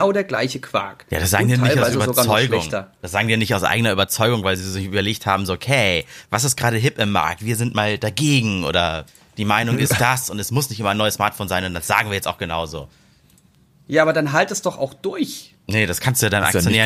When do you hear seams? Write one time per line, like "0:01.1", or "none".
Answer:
none